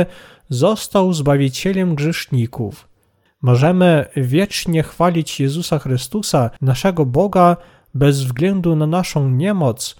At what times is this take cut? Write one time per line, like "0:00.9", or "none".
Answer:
0:03.3
0:06.6